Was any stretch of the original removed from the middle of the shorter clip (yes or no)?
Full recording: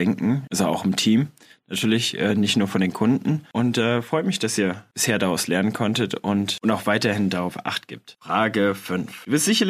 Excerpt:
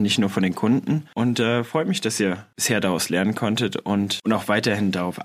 no